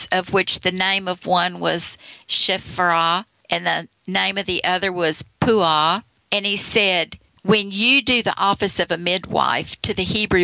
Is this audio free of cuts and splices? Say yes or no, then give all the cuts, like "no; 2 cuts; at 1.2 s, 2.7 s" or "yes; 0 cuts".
yes; 0 cuts